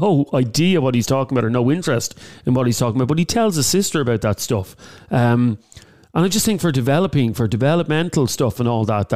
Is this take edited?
no; 0 cuts

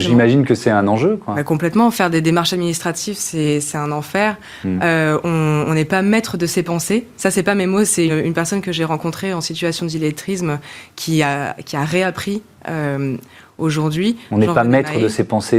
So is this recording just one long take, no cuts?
no; 1 cut; at 8.1 s

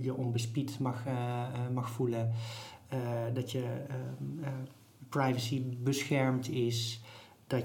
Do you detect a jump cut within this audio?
no; 0 cuts

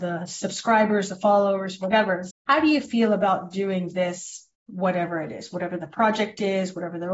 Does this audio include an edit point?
yes; 2 cuts; at 2.3 s, 4.5 s

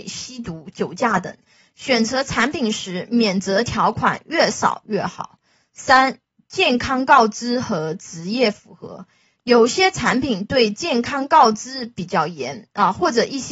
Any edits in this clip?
no; 0 cuts

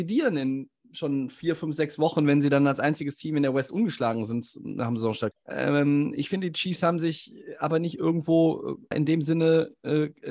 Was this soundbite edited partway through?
yes; 2 cuts; at 5.3 s, 8.9 s

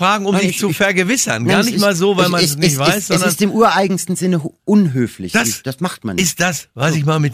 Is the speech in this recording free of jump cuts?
yes; 0 cuts

